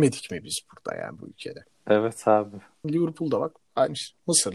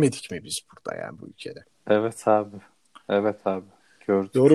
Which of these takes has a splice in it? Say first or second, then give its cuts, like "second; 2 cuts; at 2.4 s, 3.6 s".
first; 1 cut; at 2.8 s